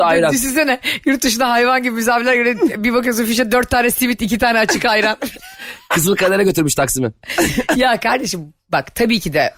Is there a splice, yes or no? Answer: no